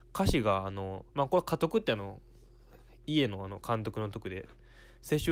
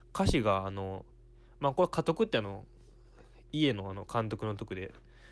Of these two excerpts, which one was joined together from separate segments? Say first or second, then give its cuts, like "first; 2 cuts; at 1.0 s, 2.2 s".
first; 1 cut; at 1.1 s